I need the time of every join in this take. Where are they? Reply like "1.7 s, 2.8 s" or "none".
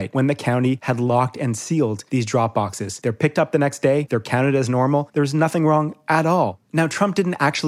none